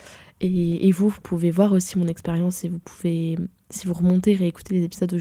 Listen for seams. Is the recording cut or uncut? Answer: uncut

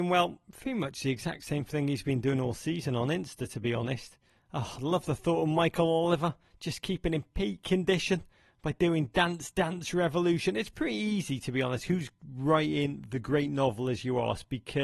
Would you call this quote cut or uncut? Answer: uncut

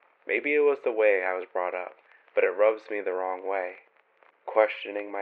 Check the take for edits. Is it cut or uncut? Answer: uncut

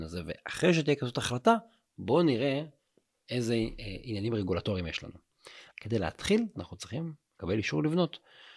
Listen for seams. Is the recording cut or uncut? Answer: cut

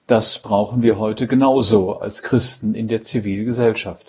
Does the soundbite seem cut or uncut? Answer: uncut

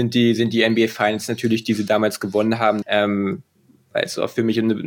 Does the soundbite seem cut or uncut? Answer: cut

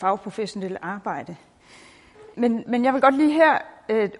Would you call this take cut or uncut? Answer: cut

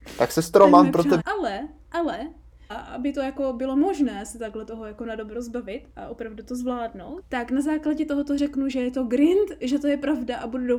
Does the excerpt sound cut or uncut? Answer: cut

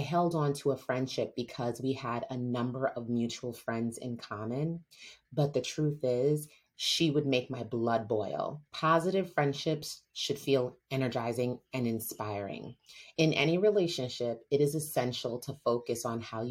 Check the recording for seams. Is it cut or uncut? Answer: cut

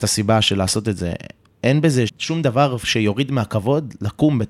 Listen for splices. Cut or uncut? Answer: cut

